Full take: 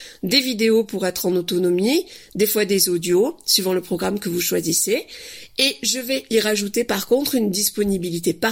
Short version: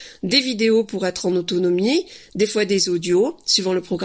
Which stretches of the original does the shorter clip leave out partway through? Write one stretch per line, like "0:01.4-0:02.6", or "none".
none